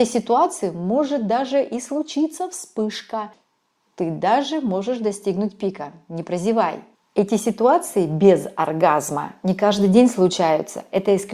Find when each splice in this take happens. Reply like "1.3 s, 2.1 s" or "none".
6.9 s